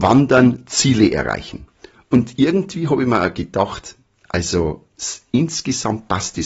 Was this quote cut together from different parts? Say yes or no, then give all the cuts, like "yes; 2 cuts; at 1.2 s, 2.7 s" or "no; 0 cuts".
no; 0 cuts